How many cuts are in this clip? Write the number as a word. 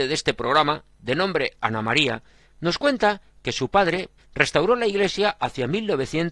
one